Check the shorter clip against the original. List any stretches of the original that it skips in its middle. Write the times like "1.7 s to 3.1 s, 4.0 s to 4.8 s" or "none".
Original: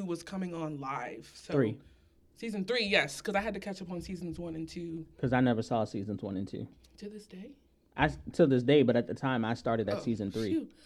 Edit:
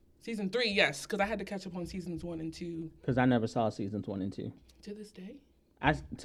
none